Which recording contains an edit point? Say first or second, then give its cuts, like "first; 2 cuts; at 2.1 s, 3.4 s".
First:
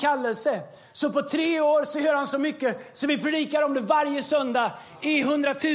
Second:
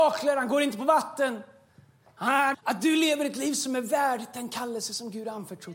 second; 1 cut; at 2.5 s